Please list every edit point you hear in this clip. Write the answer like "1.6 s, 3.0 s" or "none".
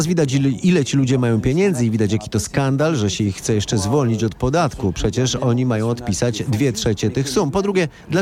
none